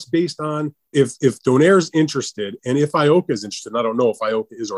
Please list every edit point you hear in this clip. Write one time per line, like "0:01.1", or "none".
0:00.9